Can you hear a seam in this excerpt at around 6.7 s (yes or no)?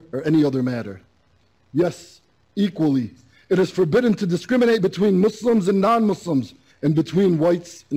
yes